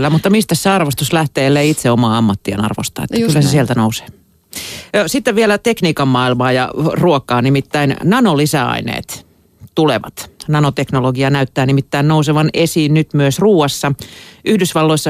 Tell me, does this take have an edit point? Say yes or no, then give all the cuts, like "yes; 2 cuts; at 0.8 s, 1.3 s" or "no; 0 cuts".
no; 0 cuts